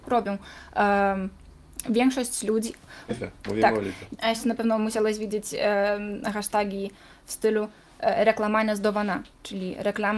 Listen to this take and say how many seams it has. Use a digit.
2